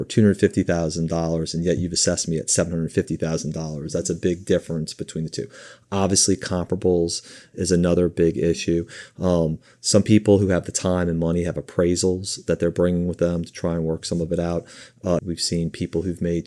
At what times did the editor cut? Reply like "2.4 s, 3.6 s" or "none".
15.2 s